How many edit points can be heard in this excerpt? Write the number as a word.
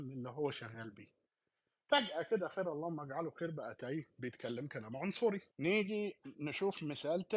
one